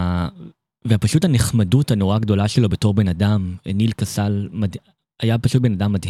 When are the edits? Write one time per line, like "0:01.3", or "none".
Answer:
none